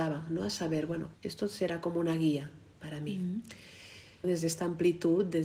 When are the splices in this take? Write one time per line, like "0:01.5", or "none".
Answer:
0:01.1
0:04.2